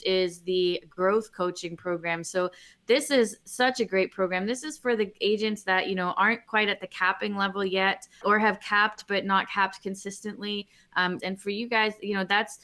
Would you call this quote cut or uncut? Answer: cut